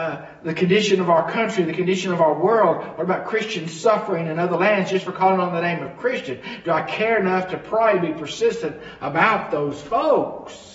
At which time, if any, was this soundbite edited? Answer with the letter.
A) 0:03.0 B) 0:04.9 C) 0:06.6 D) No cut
D